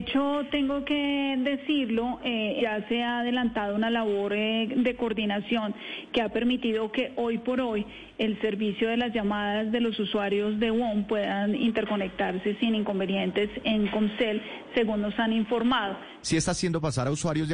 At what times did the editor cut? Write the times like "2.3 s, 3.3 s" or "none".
2.6 s, 16.2 s